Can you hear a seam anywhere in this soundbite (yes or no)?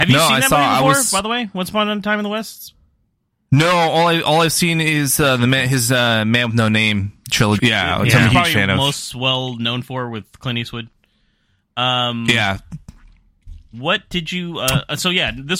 yes